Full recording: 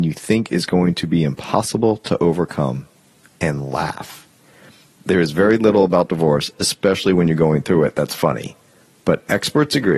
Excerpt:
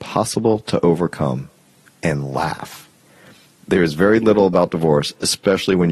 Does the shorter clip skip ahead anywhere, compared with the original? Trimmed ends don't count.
no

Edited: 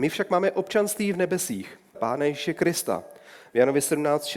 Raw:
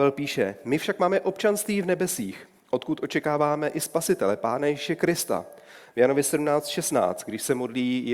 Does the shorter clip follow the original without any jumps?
no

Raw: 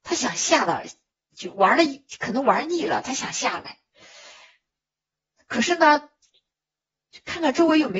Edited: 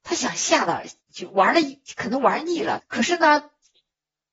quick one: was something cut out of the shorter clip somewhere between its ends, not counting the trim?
yes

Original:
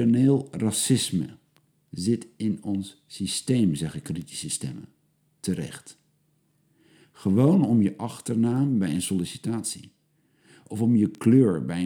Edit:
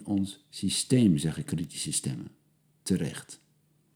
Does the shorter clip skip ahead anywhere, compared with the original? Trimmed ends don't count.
no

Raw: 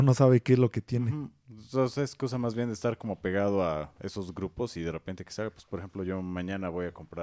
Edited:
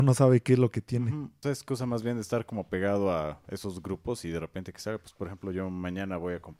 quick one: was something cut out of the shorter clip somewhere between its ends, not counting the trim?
yes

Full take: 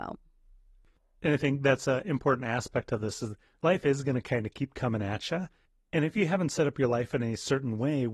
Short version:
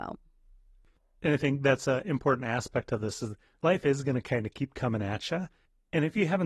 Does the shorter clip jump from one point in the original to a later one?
no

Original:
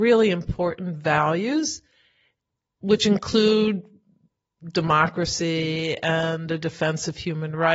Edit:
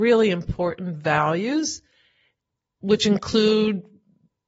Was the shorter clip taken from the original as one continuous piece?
yes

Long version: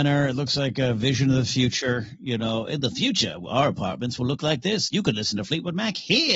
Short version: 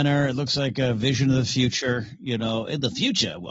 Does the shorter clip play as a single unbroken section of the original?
yes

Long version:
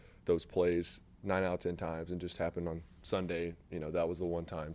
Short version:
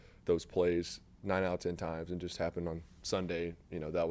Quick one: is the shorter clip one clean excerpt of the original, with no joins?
yes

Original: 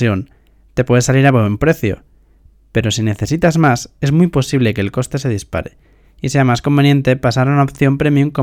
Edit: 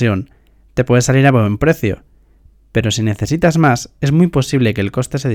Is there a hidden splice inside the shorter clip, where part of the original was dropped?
no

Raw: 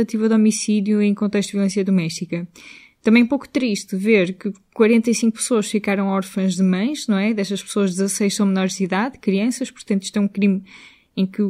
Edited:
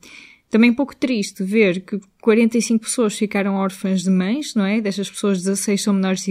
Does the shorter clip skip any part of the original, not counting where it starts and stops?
no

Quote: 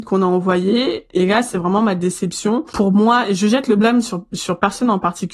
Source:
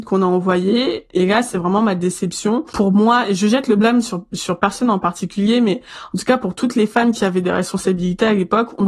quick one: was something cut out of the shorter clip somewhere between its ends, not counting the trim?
no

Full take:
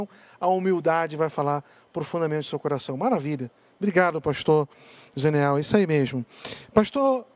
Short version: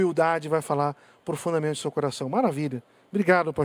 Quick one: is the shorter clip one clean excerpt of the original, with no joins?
yes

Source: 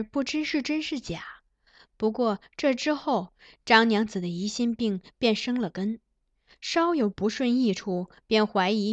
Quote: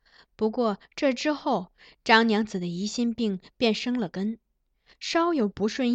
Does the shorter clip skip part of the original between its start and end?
no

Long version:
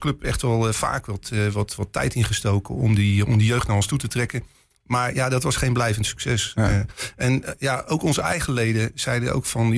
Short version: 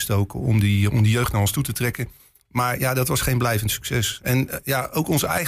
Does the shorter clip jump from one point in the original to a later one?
yes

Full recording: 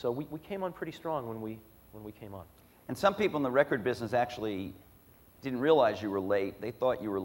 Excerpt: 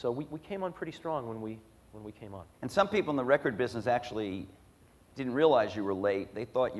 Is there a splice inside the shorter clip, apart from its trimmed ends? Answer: yes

